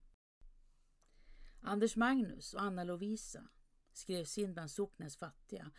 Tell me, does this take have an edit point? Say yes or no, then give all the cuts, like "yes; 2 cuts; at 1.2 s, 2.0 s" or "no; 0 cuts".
no; 0 cuts